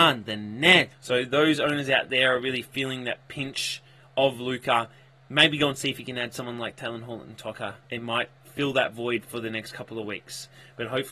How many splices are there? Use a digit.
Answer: 2